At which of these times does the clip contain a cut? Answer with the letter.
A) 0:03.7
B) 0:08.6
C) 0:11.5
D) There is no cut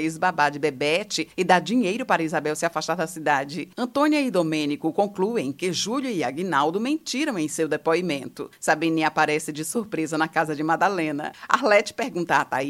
A